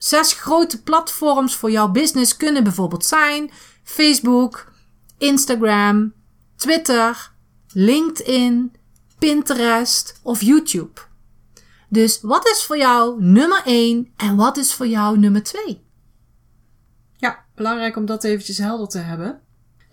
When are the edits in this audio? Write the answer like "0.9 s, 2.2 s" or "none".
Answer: none